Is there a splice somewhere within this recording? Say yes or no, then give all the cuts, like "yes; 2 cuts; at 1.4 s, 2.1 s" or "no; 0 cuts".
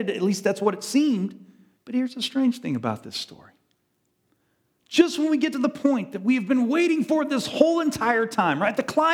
yes; 1 cut; at 1.8 s